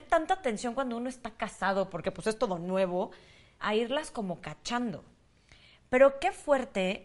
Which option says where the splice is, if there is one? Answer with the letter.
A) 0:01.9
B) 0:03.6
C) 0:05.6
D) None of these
B